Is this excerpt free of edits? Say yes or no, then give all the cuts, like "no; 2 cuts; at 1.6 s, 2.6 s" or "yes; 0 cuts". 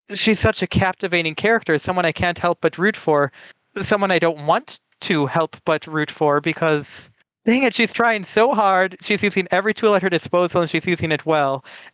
yes; 0 cuts